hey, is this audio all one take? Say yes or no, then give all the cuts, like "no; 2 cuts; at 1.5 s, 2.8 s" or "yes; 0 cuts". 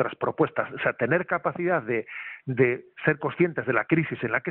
yes; 0 cuts